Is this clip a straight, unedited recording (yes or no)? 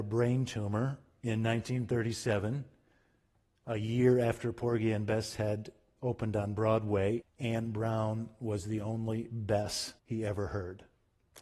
no